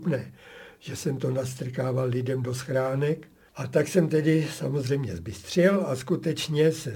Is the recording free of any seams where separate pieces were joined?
no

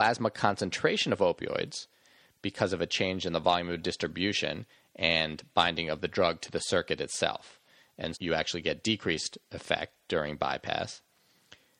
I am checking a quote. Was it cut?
yes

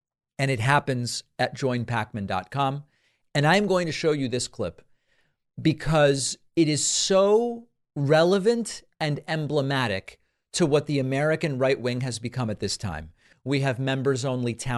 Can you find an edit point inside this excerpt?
yes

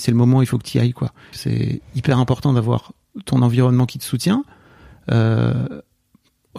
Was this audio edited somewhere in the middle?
yes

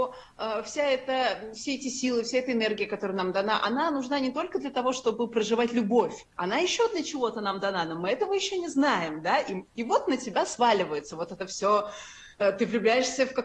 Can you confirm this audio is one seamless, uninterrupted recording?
no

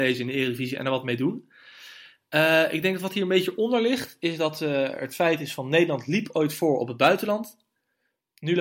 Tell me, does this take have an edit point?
no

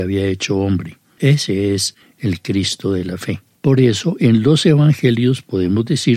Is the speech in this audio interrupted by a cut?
no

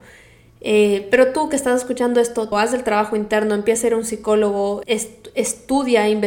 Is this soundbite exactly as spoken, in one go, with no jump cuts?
no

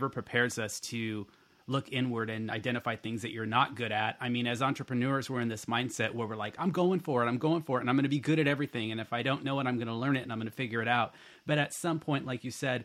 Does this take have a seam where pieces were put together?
no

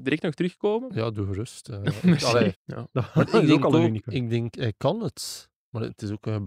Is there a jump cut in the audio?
yes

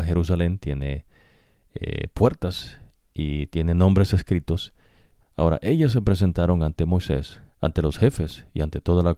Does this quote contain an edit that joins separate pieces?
yes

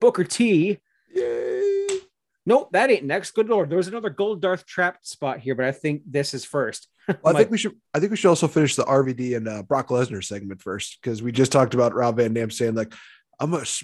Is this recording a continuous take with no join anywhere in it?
yes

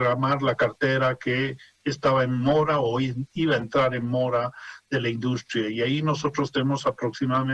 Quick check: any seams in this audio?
no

